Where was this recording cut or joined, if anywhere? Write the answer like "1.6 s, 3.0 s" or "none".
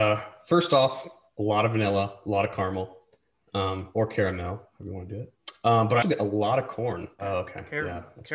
6.0 s, 7.2 s